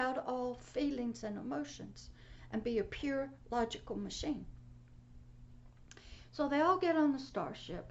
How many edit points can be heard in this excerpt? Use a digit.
0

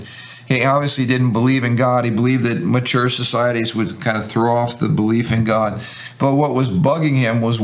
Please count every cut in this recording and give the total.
0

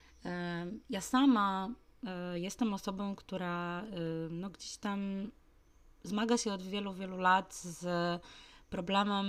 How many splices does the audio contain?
0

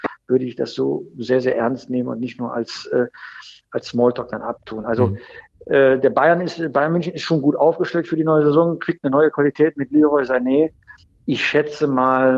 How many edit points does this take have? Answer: 0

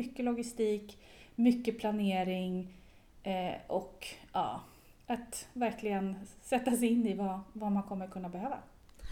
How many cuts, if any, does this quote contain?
0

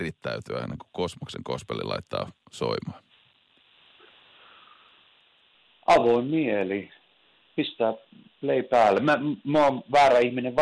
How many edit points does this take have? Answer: 0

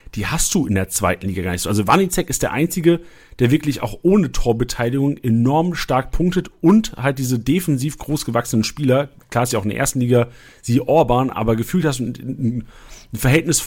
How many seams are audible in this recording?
0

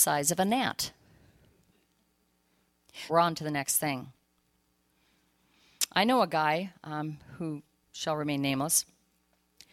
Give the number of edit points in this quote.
1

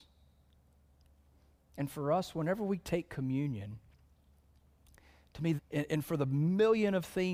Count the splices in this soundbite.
1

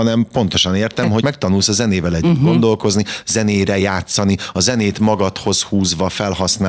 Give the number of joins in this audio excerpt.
1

